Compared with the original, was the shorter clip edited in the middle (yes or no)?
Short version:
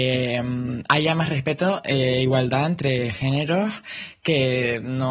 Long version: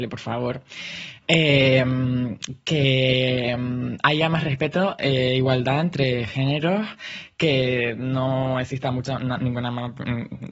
no